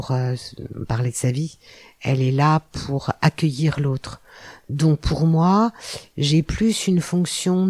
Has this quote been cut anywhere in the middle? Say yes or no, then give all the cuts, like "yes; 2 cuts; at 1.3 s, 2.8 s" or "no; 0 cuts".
no; 0 cuts